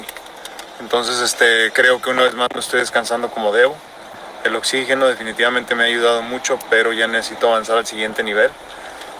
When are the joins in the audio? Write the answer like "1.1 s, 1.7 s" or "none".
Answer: 1.7 s